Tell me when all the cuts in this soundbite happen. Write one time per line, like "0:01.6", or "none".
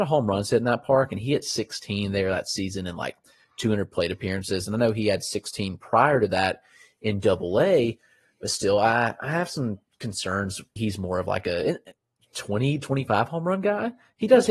0:10.8